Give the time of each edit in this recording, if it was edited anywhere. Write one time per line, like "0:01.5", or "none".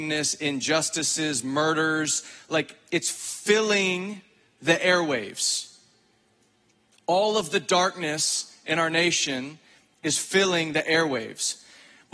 none